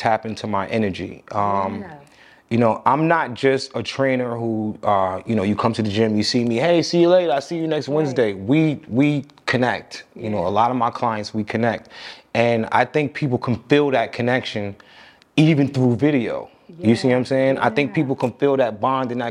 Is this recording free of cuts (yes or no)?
yes